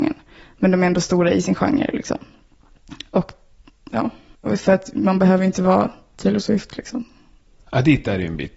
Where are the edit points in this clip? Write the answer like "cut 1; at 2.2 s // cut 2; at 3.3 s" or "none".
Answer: none